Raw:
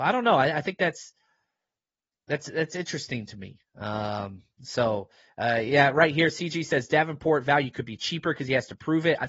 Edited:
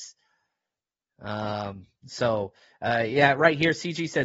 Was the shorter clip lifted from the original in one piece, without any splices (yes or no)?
no